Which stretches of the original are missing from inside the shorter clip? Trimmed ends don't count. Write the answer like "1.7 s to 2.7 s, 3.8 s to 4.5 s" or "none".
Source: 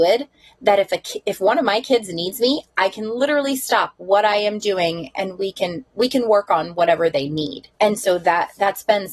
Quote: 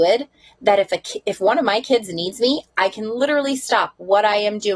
none